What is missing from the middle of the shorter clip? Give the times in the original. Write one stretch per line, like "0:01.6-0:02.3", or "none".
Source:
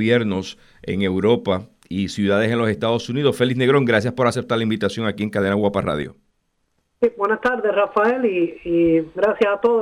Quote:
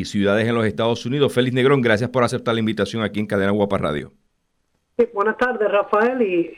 none